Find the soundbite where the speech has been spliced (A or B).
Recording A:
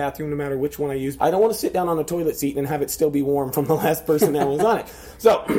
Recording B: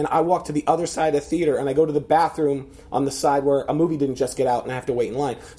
A